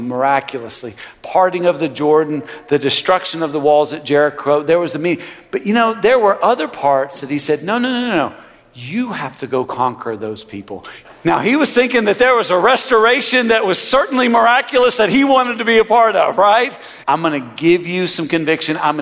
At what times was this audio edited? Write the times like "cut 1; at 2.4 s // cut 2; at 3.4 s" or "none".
cut 1; at 11.0 s // cut 2; at 17.0 s